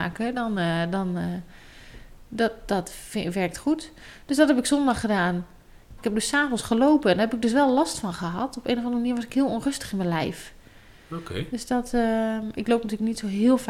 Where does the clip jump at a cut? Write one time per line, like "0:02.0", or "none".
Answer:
0:06.0